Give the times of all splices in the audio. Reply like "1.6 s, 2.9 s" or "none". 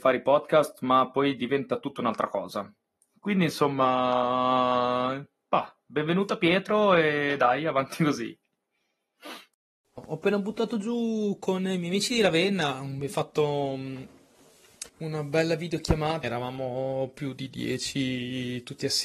10.0 s, 14.9 s, 16.2 s